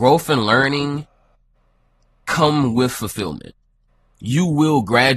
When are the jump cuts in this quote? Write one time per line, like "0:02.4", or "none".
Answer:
none

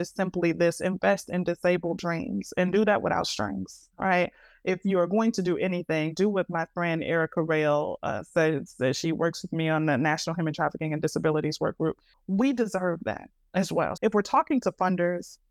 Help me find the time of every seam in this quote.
0:12.1
0:14.0

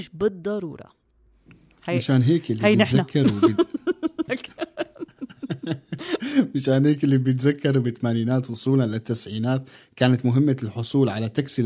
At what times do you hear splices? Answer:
0:04.3

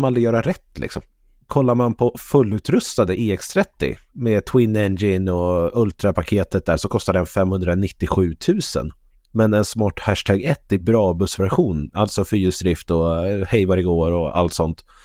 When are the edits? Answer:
none

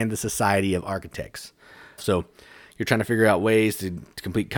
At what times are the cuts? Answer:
0:02.0

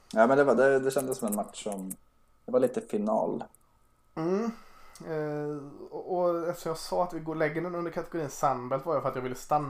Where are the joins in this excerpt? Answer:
none

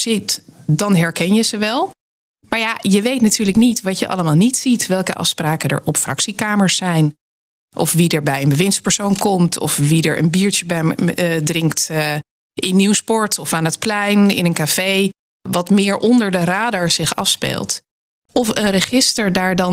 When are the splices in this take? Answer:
none

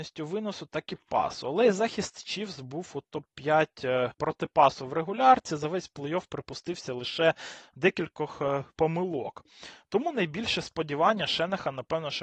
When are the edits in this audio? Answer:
none

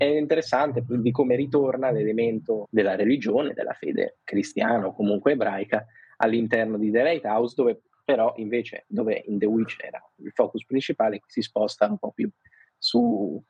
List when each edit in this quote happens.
0:02.6
0:04.2

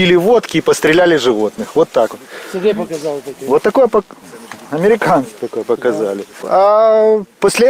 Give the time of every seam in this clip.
none

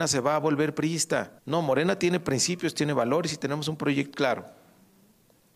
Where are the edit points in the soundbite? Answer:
0:01.4
0:04.1

